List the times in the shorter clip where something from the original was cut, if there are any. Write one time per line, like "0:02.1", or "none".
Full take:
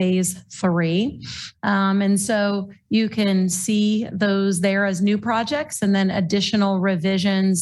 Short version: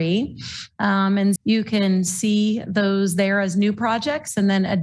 0:01.4